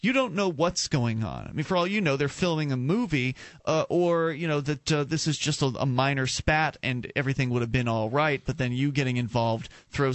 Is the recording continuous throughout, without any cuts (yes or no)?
yes